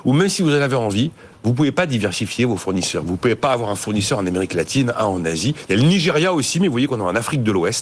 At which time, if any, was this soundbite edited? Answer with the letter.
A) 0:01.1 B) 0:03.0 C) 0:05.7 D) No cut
C